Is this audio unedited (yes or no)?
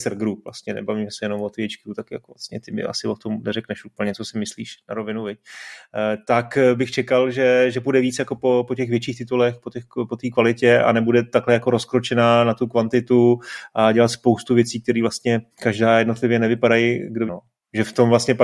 no